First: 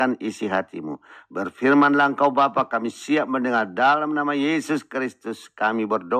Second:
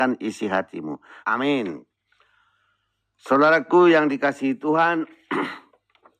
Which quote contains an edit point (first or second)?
second